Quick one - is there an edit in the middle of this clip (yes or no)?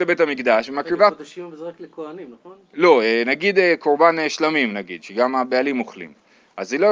no